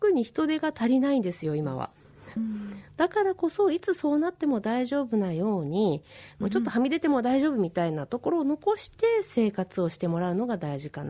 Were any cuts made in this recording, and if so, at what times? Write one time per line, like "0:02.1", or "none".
0:02.4
0:06.4